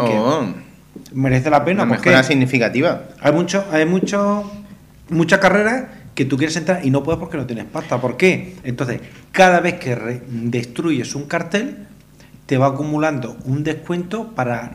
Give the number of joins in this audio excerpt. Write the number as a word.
one